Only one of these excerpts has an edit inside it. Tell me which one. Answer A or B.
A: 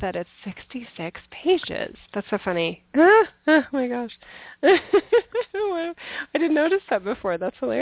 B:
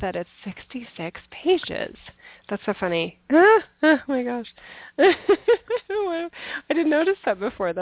A